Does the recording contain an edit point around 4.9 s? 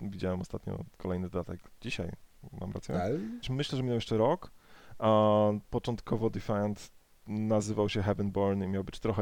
no; 1 cut; at 3.4 s

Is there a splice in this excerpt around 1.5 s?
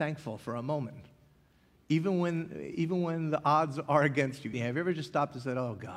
no; 1 cut; at 4.5 s

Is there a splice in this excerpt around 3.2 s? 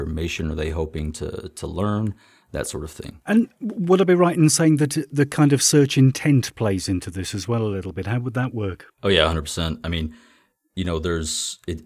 no; 0 cuts

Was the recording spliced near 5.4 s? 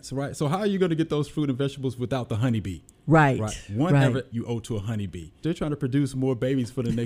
yes; 2 cuts; at 4.3 s, 5.4 s

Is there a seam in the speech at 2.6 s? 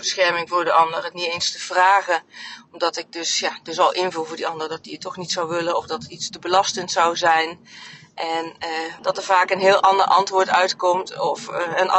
no; 1 cut; at 9.0 s

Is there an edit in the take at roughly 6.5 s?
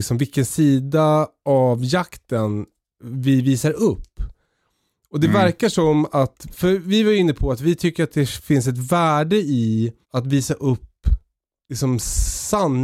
yes; 2 cuts; at 6.5 s, 10.0 s

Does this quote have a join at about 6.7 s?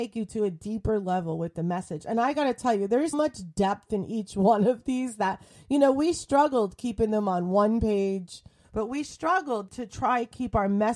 no; 3 cuts; at 3.1 s, 8.6 s, 9.7 s

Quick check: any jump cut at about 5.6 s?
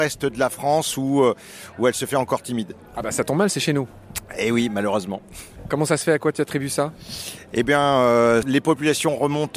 no; 0 cuts

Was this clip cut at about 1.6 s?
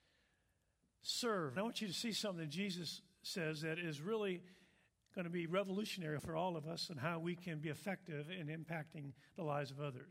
yes; 2 cuts; at 1.6 s, 6.2 s

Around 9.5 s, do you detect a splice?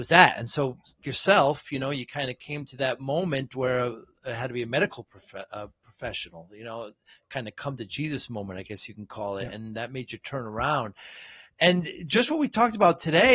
no; 1 cut; at 1.0 s

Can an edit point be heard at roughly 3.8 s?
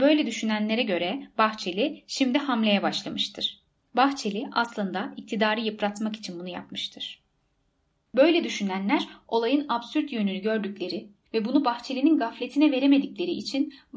yes; 1 cut; at 3.8 s

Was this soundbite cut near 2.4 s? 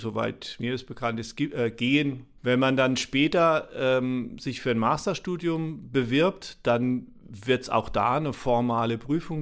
yes; 1 cut; at 2.4 s

